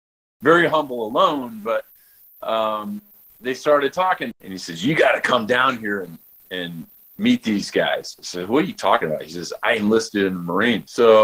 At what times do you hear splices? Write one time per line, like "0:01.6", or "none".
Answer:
0:04.3